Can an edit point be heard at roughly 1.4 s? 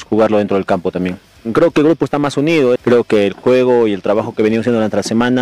no; 1 cut; at 2.8 s

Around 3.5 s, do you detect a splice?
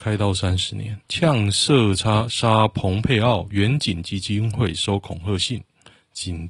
no; 1 cut; at 1.0 s

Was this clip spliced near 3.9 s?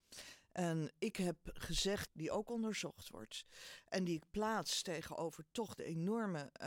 no; 1 cut; at 2.1 s

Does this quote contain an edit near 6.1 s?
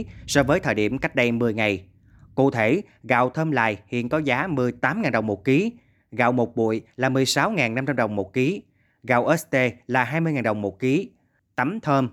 no; 0 cuts

